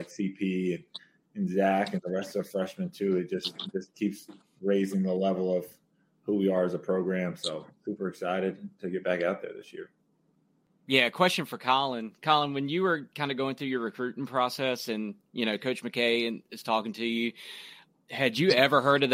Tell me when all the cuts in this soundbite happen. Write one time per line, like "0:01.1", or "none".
0:17.9